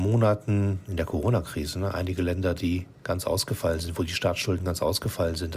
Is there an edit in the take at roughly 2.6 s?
no; 0 cuts

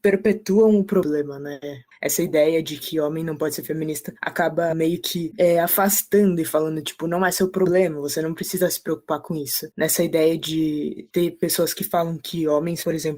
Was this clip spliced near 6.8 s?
no; 1 cut; at 9.7 s

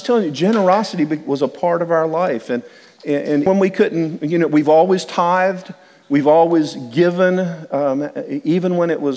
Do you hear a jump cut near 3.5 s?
yes; 1 cut; at 3.5 s

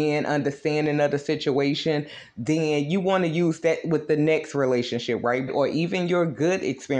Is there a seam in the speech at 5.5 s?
yes; 1 cut; at 5.5 s

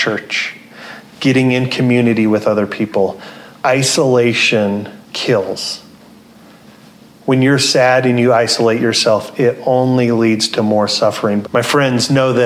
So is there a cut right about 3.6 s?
no; 2 cuts; at 5.0 s, 11.4 s

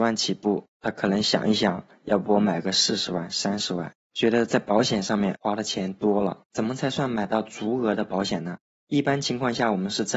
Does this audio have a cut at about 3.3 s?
no; 1 cut; at 6.4 s

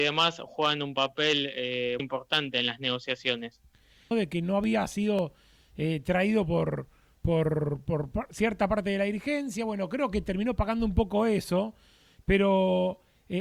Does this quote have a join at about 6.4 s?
no; 3 cuts; at 2.0 s, 4.1 s, 8.1 s

